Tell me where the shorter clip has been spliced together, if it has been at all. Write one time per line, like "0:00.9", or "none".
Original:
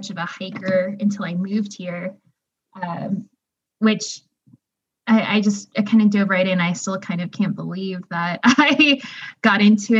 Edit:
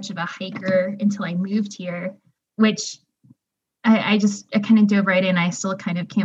0:02.4